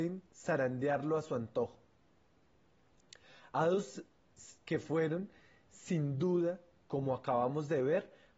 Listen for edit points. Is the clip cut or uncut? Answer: cut